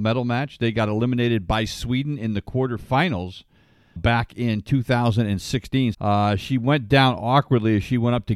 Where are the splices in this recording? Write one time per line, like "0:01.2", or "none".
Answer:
0:04.0
0:05.9